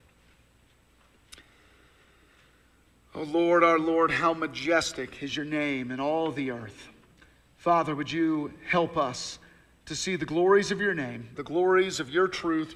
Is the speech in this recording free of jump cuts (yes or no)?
no